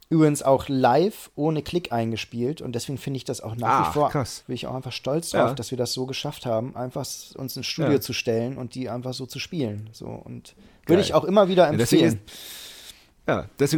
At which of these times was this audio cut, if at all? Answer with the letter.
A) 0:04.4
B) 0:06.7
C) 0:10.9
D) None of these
A